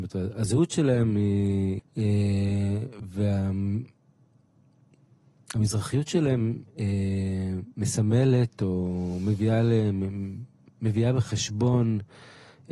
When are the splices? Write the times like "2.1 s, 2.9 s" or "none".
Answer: 1.8 s